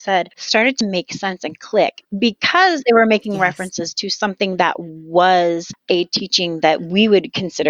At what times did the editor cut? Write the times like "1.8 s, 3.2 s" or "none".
none